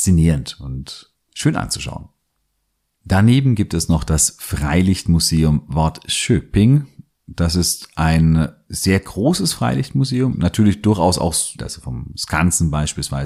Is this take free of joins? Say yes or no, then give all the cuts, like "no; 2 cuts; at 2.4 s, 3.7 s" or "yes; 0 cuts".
no; 2 cuts; at 10.3 s, 11.6 s